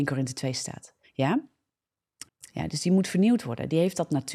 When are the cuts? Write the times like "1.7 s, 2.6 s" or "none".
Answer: 1.0 s, 2.3 s